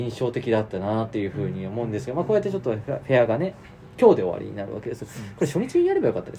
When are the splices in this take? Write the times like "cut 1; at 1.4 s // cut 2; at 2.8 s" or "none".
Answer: none

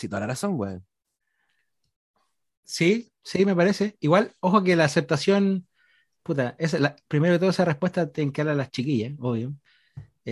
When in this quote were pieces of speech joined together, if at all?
none

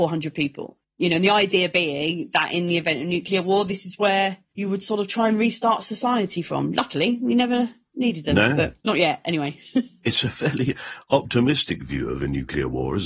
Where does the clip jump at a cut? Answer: none

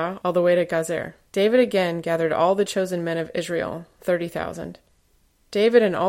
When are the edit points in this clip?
cut 1; at 1.3 s

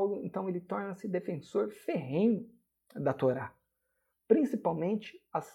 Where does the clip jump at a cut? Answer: cut 1; at 4.1 s

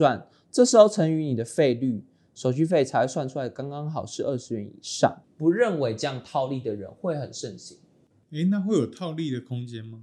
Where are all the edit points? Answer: cut 1; at 5.2 s // cut 2; at 8.1 s

